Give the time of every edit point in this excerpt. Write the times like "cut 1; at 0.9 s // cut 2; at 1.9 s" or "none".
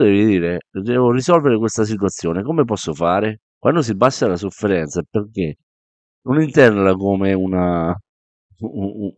cut 1; at 3.4 s